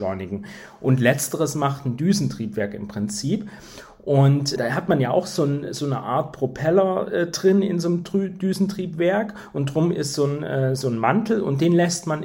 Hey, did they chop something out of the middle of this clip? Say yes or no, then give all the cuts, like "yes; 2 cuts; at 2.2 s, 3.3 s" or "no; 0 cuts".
yes; 1 cut; at 4.6 s